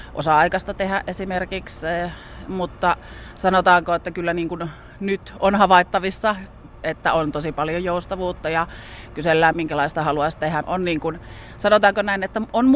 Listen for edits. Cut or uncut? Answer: cut